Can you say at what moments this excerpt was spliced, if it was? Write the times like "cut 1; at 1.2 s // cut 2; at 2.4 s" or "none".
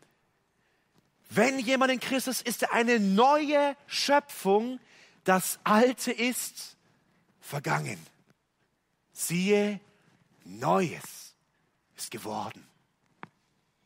cut 1; at 2.4 s